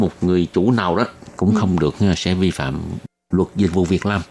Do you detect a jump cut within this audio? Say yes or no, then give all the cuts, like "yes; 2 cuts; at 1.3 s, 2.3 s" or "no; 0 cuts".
no; 0 cuts